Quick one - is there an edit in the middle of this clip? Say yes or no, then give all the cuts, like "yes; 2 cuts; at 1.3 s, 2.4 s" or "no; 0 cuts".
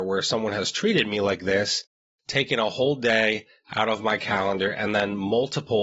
no; 0 cuts